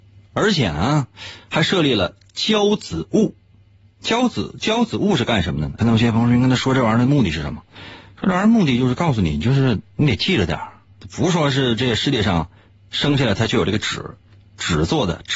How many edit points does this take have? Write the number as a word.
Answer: one